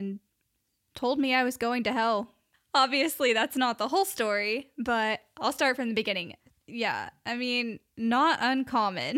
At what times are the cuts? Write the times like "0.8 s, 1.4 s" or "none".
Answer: 6.5 s